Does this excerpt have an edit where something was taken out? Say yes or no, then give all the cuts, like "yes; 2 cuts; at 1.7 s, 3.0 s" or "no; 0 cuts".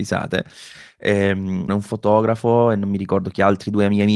yes; 1 cut; at 1.7 s